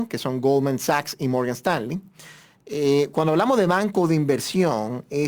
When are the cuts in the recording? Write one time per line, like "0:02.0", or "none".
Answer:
none